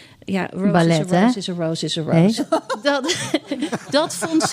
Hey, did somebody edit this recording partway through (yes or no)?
yes